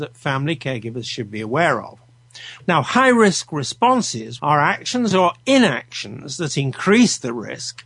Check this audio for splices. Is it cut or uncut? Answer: cut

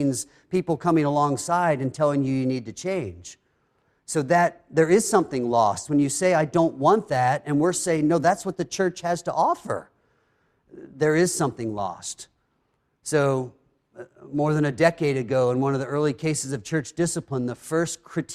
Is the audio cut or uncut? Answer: uncut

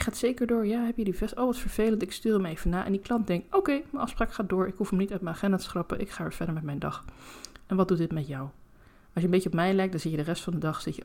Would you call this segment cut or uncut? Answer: uncut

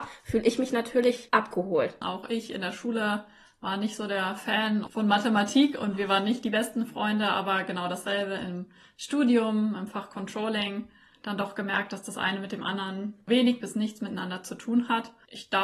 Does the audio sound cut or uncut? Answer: cut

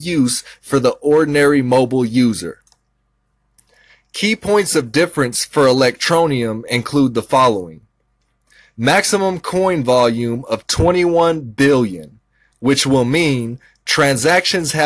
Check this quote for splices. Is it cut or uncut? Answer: uncut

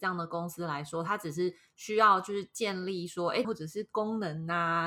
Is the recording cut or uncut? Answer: cut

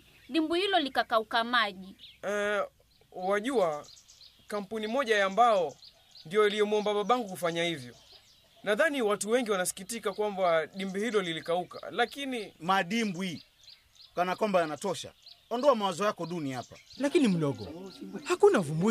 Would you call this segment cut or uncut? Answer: cut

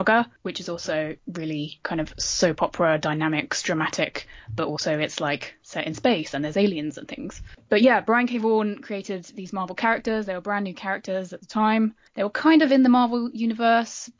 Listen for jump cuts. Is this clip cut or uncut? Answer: uncut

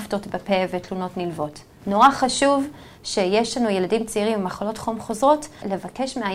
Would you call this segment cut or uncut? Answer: cut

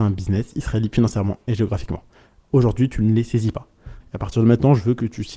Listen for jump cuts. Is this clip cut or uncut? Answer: cut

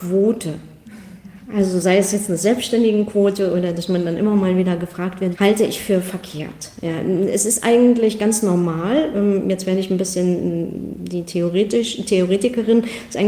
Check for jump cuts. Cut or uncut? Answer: cut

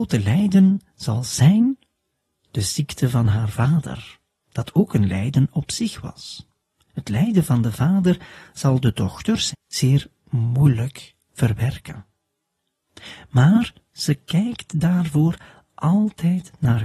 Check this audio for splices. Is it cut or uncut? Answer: cut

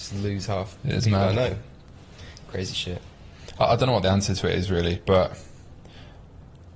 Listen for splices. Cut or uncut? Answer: uncut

